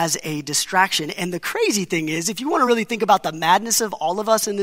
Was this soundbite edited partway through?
no; 0 cuts

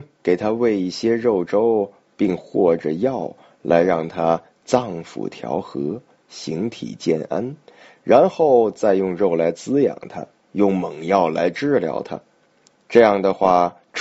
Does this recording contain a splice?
no; 0 cuts

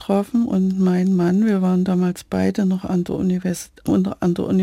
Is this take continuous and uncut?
yes; 0 cuts

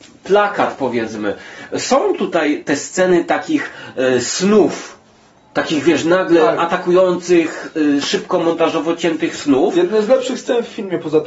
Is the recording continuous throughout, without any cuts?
yes; 0 cuts

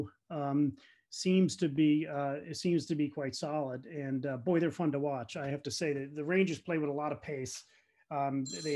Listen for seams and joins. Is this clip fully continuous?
yes; 0 cuts

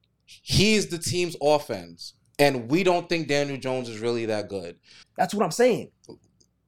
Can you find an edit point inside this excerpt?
yes; 1 cut; at 5.0 s

